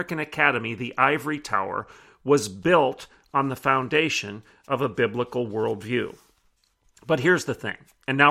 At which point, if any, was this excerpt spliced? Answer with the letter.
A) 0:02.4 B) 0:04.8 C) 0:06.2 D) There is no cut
D